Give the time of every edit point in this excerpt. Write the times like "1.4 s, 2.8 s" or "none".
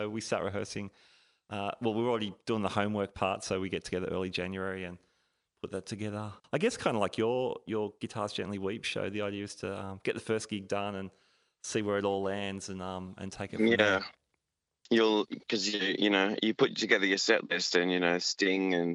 none